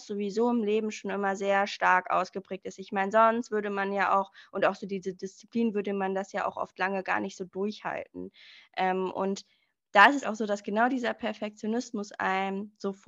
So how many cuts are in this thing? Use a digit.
1